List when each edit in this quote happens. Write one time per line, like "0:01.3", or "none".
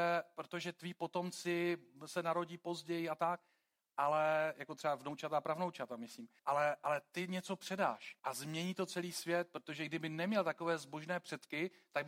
0:06.4
0:08.2